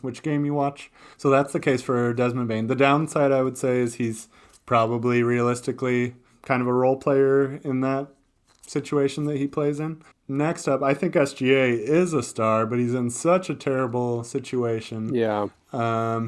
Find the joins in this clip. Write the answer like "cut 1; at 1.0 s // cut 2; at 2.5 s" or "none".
cut 1; at 1.1 s // cut 2; at 10.1 s